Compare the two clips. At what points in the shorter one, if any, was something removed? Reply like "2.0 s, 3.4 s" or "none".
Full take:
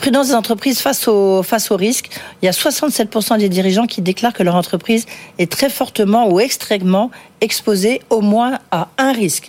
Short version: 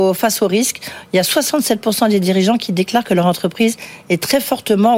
none